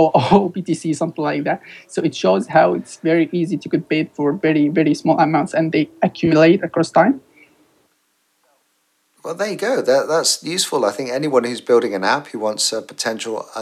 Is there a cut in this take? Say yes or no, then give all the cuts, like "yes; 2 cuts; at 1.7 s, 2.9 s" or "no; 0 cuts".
no; 0 cuts